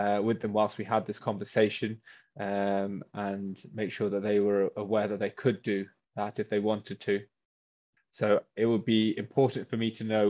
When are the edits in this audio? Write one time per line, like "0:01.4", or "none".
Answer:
0:08.0